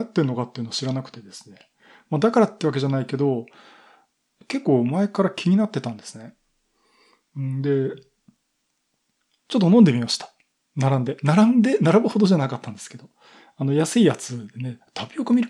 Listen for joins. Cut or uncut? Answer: uncut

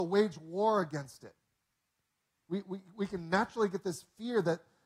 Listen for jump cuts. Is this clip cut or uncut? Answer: uncut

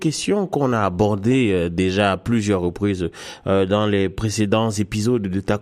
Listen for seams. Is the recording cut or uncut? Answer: uncut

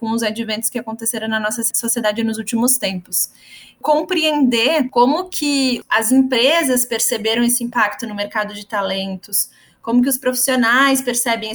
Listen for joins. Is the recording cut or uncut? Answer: uncut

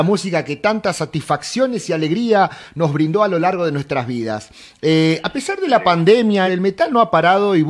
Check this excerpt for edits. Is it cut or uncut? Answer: cut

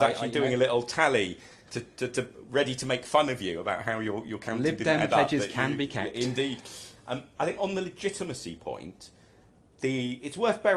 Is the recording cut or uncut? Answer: uncut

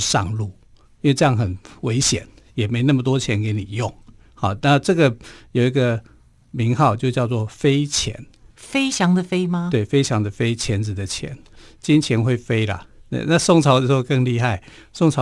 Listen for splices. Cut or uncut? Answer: cut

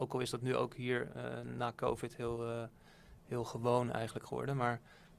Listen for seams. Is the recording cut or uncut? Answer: uncut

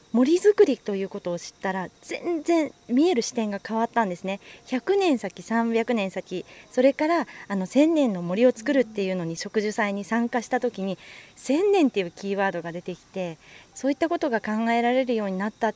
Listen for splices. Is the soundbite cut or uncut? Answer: uncut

